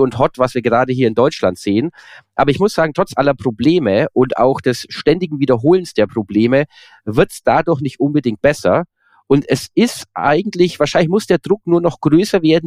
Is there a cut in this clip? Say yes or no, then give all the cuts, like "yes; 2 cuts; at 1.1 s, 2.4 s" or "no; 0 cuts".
no; 0 cuts